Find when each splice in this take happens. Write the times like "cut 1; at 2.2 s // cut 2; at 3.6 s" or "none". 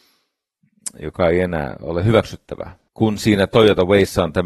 cut 1; at 2.9 s